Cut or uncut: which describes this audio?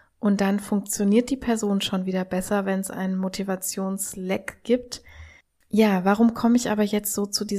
uncut